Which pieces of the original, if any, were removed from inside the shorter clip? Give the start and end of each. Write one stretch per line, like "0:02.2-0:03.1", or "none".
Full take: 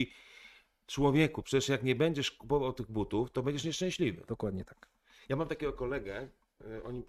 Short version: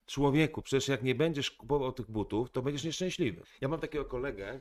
0:04.2-0:05.1